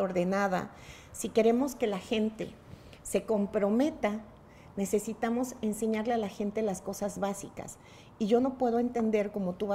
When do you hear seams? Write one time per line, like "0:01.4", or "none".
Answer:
none